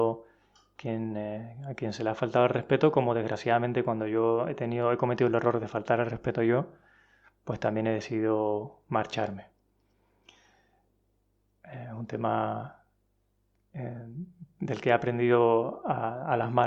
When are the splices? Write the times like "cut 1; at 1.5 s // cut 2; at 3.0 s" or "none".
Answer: none